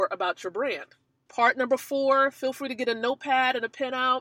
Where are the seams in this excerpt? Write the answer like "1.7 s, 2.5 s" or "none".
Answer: 1.3 s